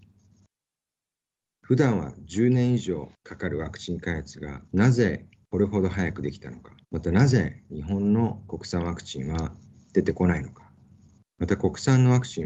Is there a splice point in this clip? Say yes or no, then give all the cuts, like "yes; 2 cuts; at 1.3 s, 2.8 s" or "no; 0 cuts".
yes; 3 cuts; at 1.5 s, 4.7 s, 6.8 s